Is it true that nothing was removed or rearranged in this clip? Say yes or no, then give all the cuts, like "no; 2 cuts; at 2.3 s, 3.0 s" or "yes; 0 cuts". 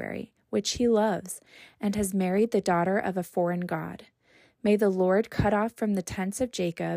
yes; 0 cuts